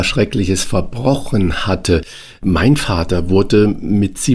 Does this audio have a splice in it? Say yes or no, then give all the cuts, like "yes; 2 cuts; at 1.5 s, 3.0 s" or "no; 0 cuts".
no; 0 cuts